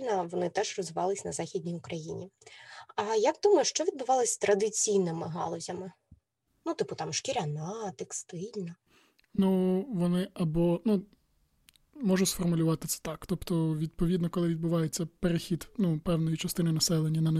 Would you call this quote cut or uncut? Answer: uncut